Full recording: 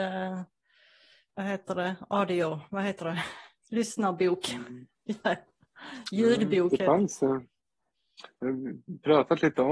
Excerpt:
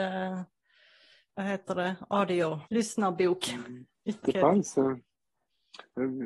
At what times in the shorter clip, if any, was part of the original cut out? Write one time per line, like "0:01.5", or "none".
0:02.7
0:04.2